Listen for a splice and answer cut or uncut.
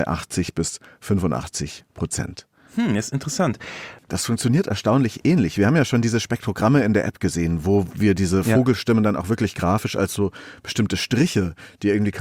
cut